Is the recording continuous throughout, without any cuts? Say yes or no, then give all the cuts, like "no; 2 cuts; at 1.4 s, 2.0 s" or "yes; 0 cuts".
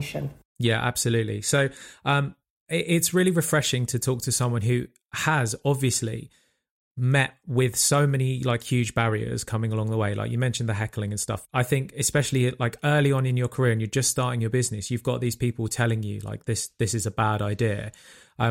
no; 1 cut; at 11.5 s